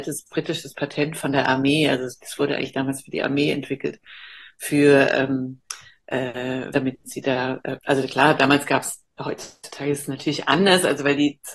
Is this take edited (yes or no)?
yes